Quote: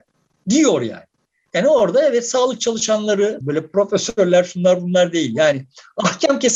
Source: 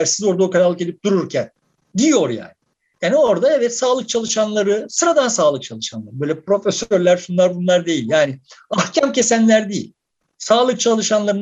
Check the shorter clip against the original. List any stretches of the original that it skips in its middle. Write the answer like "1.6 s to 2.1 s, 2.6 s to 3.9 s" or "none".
4.9 s to 6.1 s